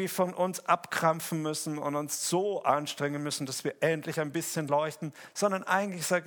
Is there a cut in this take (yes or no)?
no